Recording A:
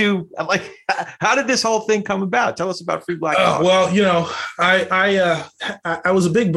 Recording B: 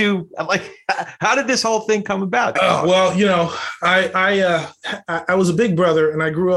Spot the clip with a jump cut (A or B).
B